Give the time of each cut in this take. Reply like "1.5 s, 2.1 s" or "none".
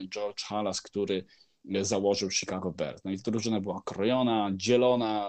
none